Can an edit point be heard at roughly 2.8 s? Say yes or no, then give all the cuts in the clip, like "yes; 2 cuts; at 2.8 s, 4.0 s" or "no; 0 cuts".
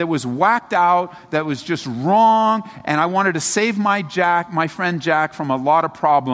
no; 0 cuts